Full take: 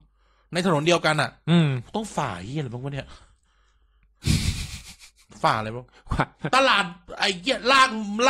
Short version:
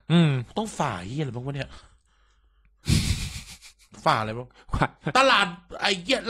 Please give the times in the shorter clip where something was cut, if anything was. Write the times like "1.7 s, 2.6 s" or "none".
none